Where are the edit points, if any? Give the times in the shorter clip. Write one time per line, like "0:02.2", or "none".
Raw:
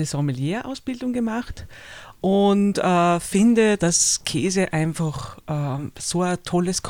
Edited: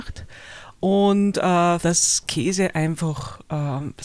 0:01.8